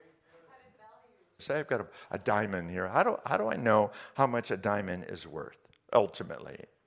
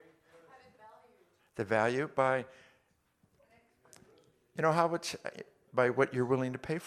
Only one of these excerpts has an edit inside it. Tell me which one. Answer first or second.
first